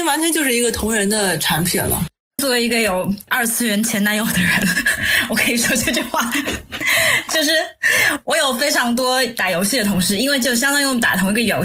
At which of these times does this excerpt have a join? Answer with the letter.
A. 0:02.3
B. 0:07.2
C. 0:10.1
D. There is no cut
D